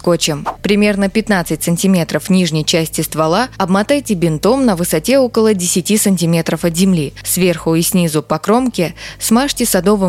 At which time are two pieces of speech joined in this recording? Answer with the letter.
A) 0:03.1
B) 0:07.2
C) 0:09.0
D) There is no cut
D